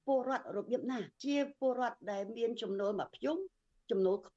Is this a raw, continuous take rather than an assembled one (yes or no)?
no